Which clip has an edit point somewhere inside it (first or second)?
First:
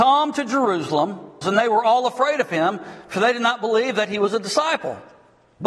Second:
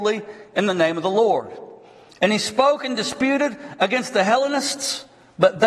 first